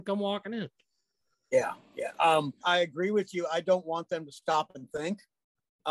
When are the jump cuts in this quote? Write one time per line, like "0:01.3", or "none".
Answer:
0:02.6